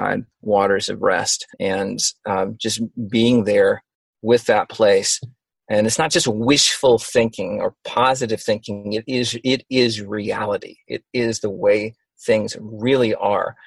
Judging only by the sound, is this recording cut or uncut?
cut